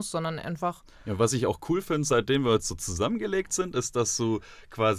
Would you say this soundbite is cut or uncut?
uncut